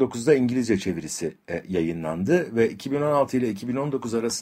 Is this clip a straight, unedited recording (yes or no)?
yes